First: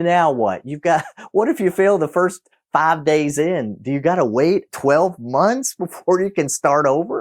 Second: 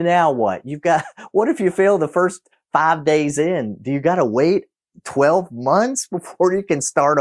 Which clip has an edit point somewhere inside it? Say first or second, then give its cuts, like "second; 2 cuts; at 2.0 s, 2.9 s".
first; 1 cut; at 4.7 s